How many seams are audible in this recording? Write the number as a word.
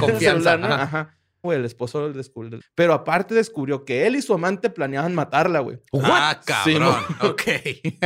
two